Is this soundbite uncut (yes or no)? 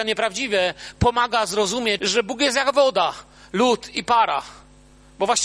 no